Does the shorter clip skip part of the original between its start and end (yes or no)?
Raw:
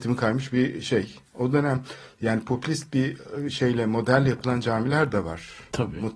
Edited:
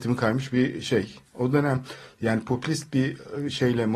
no